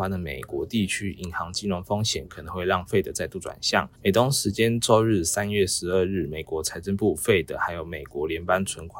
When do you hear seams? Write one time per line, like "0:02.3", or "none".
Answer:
0:03.9